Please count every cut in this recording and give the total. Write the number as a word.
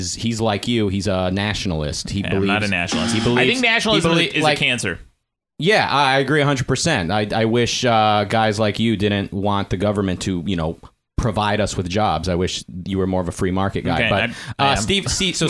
zero